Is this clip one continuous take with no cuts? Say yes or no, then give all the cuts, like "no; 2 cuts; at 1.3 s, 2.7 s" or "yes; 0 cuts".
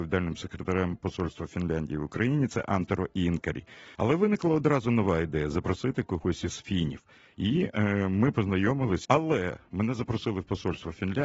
no; 2 cuts; at 4.0 s, 9.1 s